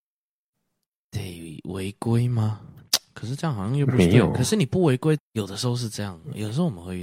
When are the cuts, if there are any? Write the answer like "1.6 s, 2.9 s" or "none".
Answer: 5.2 s

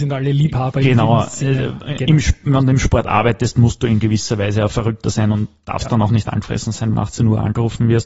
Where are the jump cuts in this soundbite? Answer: 6.9 s

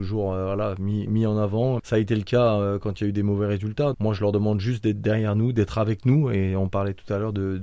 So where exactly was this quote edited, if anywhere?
1.8 s, 3.9 s

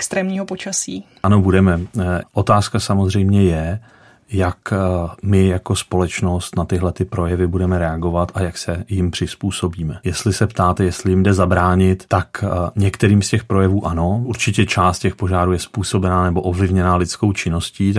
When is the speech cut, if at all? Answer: 2.2 s

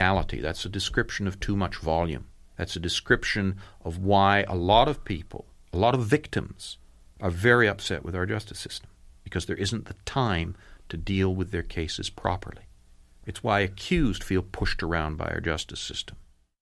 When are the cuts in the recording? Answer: none

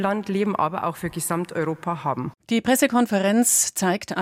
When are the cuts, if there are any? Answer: 2.4 s

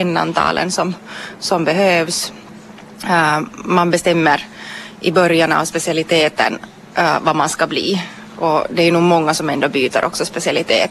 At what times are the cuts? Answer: none

